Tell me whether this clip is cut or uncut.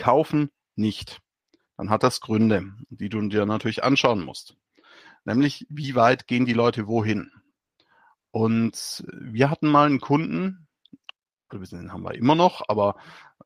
uncut